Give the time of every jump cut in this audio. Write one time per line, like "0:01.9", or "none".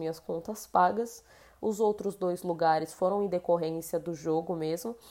0:01.6